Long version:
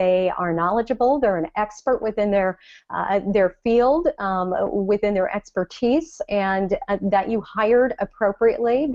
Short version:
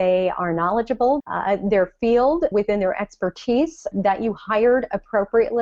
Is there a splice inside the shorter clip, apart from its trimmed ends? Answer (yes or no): yes